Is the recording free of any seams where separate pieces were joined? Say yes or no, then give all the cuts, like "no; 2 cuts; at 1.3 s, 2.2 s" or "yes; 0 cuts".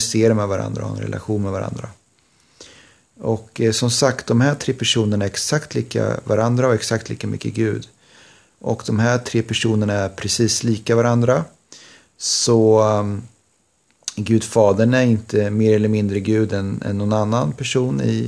no; 1 cut; at 8.5 s